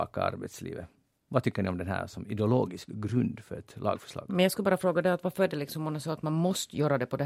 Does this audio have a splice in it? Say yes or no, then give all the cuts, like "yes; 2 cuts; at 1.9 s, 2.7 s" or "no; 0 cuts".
no; 0 cuts